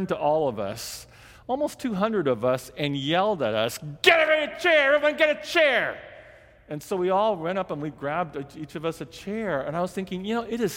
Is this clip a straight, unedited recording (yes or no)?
yes